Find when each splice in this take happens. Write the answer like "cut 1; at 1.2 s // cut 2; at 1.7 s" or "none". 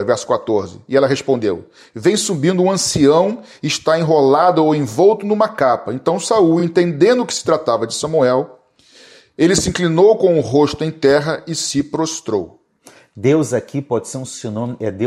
none